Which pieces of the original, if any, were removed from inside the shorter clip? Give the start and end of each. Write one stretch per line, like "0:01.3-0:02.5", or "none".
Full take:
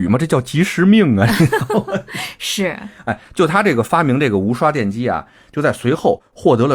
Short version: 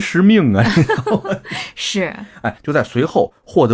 0:03.2-0:05.5

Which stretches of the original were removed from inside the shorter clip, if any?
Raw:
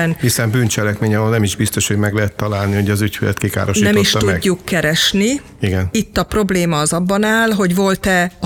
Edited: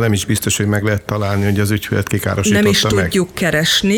none

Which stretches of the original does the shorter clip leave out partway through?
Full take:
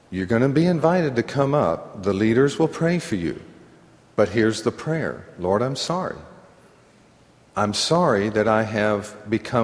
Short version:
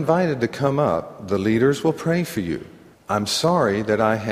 0:03.7-0:07.4

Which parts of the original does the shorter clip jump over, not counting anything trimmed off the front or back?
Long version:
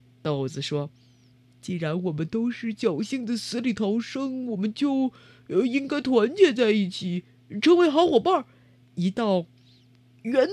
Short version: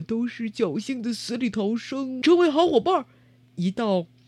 0:04.5-0:07.6

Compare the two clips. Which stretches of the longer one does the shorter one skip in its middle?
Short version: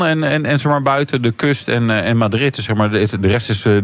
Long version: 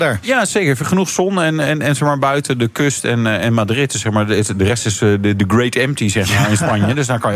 none

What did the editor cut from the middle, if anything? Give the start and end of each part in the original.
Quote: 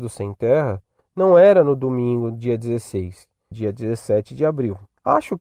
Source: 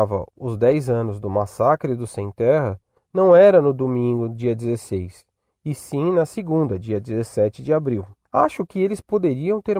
0:05.5-0:06.8

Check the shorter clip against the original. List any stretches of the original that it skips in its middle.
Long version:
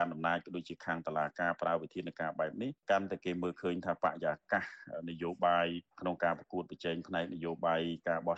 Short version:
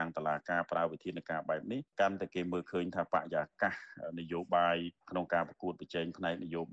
none

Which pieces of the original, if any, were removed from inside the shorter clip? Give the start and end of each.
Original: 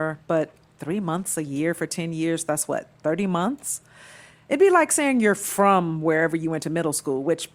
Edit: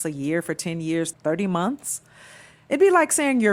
0:02.5-0:02.9

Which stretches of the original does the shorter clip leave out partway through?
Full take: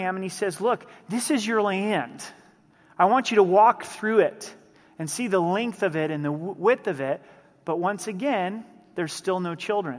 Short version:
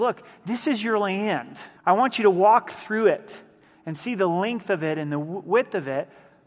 0:02.4-0:02.9

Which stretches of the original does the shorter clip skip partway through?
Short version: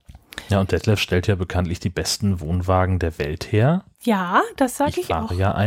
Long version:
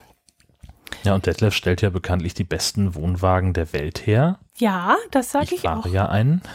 none

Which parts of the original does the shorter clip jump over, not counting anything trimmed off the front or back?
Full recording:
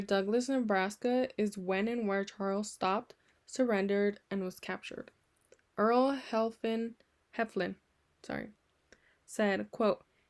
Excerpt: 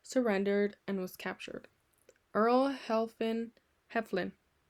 none

